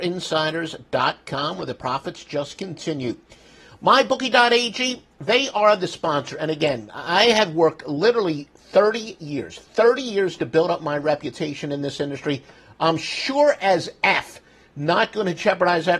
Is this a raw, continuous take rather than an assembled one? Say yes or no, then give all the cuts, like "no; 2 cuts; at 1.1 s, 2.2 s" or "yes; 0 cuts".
yes; 0 cuts